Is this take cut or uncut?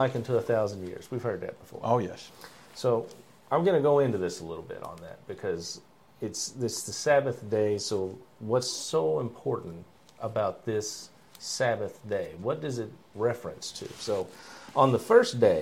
uncut